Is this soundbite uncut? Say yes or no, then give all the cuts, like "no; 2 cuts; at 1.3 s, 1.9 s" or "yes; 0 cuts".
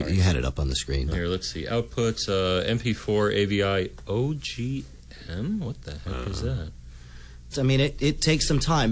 no; 2 cuts; at 1.1 s, 7.5 s